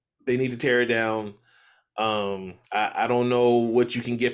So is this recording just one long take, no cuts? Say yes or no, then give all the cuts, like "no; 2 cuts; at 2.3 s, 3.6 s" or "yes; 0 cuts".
no; 1 cut; at 2.6 s